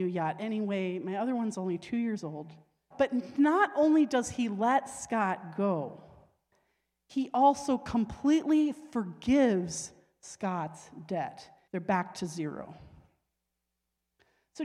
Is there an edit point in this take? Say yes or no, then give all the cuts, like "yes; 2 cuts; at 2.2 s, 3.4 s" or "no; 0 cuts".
yes; 2 cuts; at 2.9 s, 11.7 s